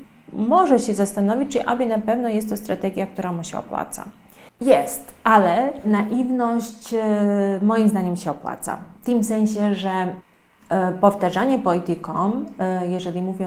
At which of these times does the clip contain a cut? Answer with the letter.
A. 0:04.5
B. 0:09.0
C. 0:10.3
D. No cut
A